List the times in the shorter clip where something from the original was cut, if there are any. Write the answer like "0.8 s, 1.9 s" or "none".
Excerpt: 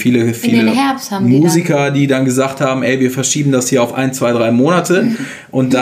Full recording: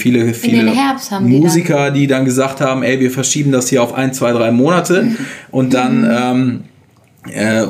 none